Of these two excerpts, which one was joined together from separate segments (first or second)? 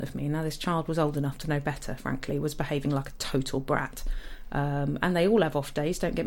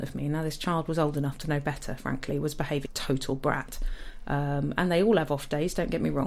second